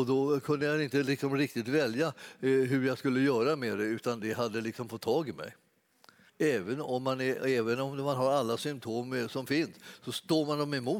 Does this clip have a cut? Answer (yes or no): yes